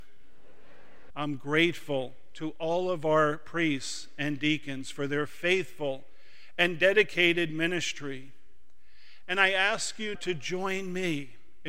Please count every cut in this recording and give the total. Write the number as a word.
two